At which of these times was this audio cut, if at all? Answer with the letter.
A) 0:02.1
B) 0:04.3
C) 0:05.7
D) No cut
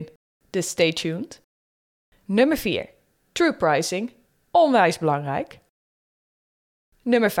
A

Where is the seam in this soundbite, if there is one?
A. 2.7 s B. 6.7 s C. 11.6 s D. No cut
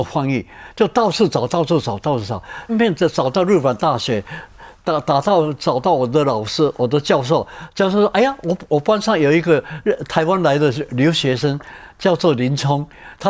A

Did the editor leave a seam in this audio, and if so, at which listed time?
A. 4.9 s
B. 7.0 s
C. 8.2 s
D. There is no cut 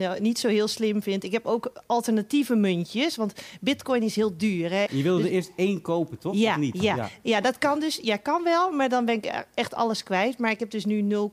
A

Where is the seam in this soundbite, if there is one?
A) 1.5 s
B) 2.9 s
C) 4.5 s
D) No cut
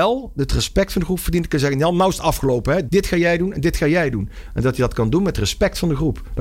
B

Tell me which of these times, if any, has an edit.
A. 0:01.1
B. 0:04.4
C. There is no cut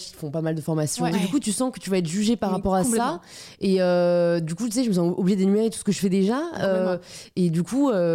A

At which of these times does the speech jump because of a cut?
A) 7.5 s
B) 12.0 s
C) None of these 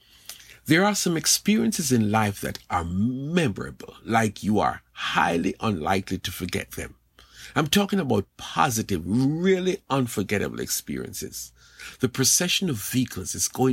B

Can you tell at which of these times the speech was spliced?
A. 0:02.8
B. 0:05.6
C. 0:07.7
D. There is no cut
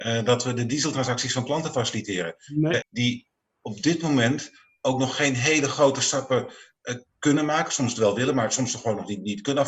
A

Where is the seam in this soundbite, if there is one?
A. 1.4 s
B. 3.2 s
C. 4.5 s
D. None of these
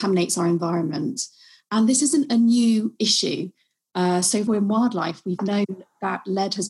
C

